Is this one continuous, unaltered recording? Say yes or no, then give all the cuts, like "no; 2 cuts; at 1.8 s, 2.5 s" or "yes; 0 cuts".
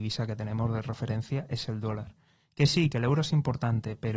yes; 0 cuts